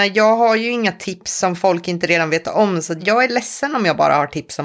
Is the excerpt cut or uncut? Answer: cut